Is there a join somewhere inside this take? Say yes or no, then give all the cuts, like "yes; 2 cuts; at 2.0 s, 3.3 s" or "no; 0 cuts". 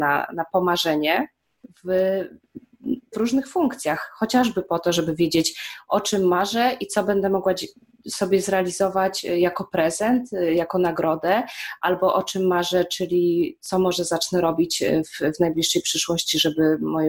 yes; 1 cut; at 3.1 s